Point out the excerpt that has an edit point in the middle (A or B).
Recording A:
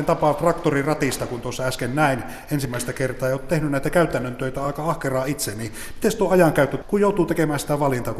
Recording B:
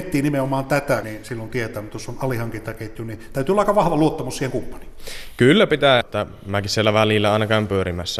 B